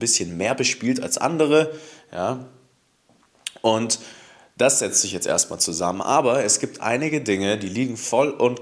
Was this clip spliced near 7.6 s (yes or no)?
no